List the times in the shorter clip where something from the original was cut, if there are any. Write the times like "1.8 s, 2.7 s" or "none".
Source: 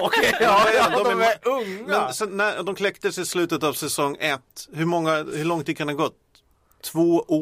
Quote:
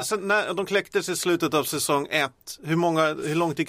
none